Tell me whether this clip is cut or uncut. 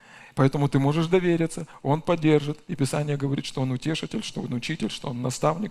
uncut